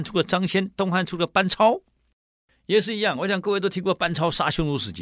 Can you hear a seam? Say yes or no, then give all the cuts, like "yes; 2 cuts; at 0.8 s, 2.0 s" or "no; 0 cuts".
no; 0 cuts